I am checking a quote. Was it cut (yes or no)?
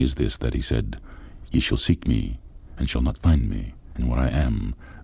no